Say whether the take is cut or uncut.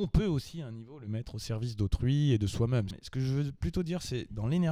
cut